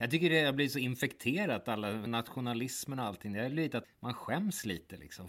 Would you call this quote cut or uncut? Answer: cut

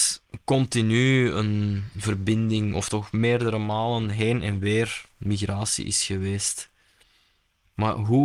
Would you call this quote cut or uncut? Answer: uncut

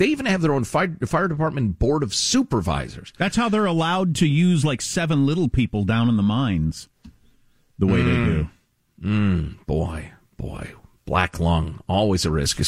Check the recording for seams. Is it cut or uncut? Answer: uncut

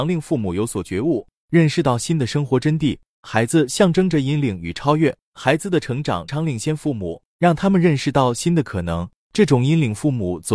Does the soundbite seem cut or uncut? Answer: cut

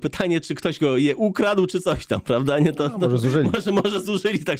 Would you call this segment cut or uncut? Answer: uncut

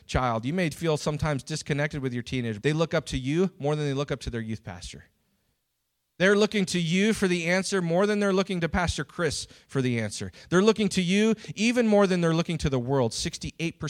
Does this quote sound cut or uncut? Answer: cut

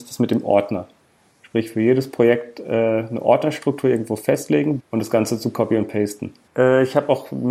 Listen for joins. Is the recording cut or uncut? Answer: cut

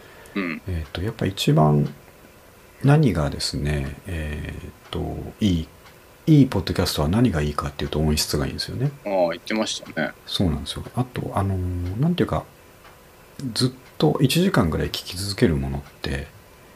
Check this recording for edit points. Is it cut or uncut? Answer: uncut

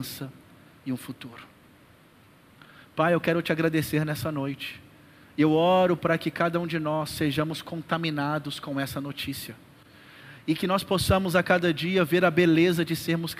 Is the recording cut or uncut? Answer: uncut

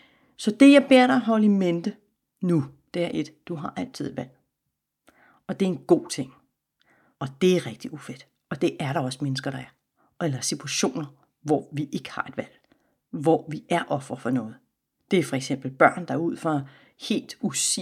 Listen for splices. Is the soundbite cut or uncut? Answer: cut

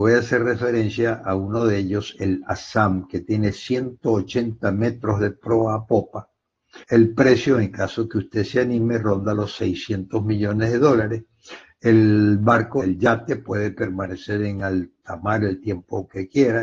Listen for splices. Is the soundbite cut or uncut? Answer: cut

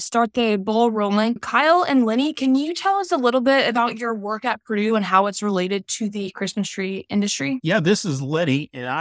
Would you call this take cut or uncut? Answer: uncut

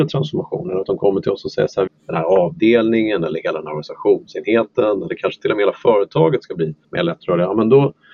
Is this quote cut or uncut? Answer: cut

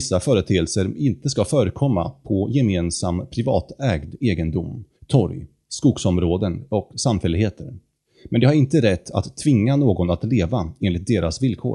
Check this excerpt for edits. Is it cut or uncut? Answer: cut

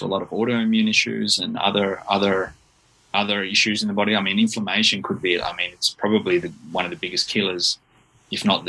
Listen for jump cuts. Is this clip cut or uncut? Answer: uncut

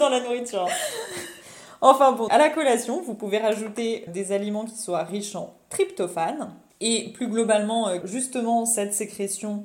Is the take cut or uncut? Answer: cut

